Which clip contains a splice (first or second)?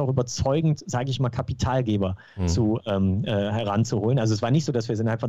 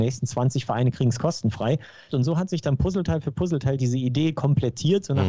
second